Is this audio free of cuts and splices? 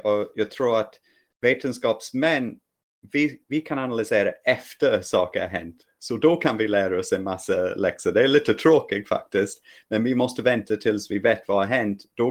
yes; 0 cuts

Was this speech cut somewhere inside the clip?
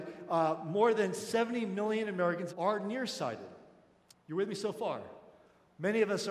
yes; 2 cuts; at 2.5 s, 4.1 s

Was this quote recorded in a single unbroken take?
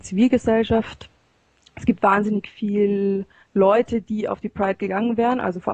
yes; 0 cuts

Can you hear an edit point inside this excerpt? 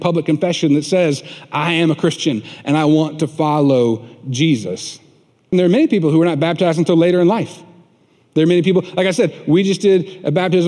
yes; 1 cut; at 5.5 s

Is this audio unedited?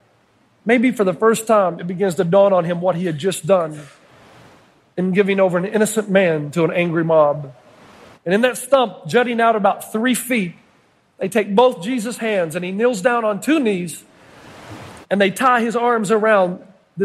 no; 2 cuts; at 8.1 s, 15.0 s

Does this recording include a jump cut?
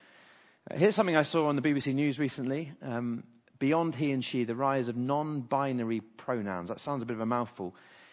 no; 0 cuts

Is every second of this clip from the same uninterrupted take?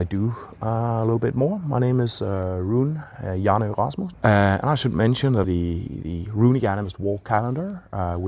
no; 2 cuts; at 4.1 s, 5.4 s

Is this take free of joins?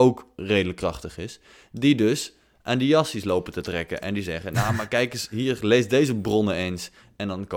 yes; 0 cuts

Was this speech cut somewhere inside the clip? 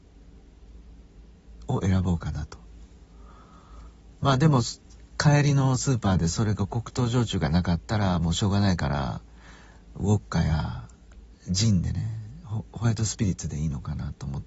no; 0 cuts

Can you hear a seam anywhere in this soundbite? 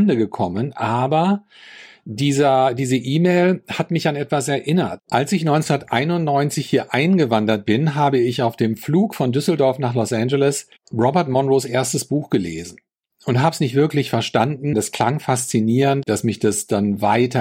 yes; 2 cuts; at 14.7 s, 16.0 s

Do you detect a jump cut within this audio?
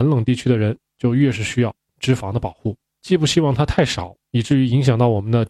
yes; 1 cut; at 2.9 s

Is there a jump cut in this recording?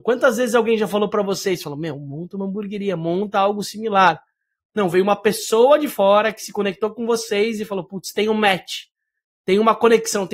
no; 0 cuts

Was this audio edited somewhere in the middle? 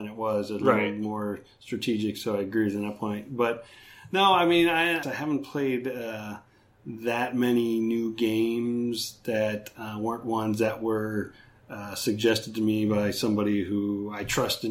yes; 1 cut; at 5.0 s

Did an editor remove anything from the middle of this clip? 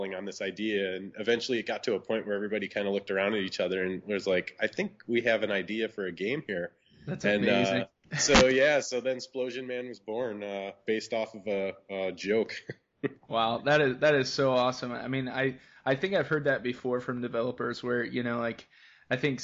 no; 0 cuts

